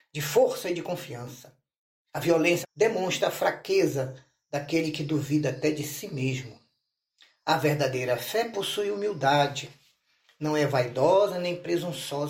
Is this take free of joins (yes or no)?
no